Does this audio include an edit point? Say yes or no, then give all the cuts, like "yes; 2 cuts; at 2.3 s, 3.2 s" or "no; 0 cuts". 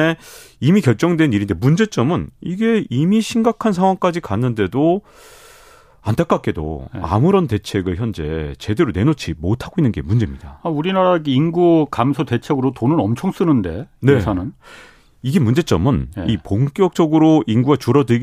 no; 0 cuts